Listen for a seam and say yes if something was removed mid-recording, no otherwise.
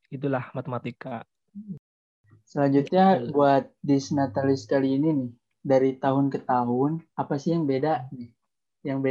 yes